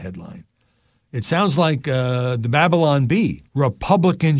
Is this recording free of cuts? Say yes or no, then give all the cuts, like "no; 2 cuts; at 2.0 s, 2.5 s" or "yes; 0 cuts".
no; 1 cut; at 3.5 s